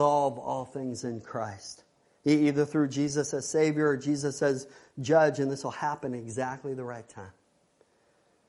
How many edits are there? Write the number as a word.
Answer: zero